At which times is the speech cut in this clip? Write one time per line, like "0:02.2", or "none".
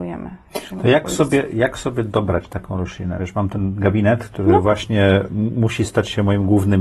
none